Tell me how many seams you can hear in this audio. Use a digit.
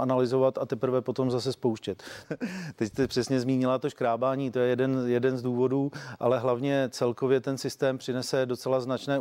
1